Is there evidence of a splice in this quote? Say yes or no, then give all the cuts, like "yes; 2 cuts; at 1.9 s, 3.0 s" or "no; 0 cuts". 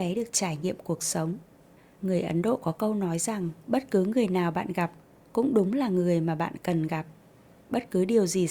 no; 0 cuts